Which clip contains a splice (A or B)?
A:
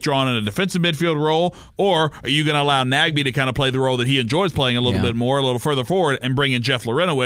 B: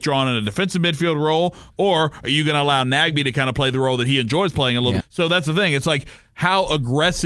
B